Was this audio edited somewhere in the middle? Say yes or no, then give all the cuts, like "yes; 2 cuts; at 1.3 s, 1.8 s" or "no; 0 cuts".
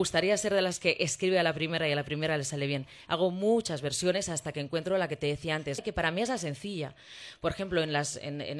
yes; 2 cuts; at 3.1 s, 5.8 s